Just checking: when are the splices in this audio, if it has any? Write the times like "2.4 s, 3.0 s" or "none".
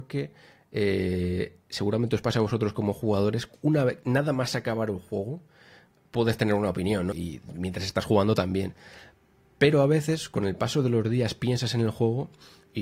7.1 s